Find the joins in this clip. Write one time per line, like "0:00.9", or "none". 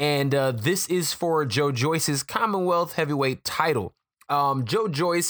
none